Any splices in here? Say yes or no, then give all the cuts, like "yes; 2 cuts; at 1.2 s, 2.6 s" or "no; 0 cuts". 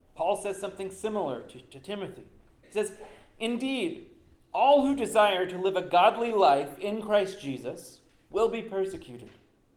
no; 0 cuts